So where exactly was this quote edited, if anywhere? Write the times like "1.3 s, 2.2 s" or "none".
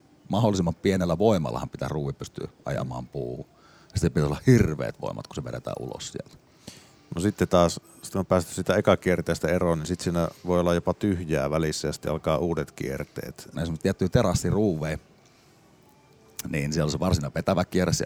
13.5 s